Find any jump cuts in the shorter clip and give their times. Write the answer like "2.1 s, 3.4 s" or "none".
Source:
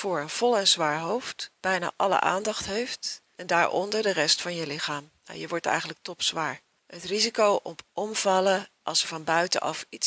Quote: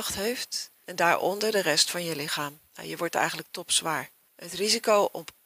none